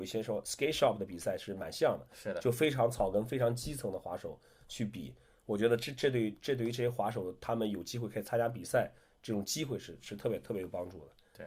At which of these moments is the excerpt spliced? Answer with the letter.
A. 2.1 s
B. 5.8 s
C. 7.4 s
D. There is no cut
D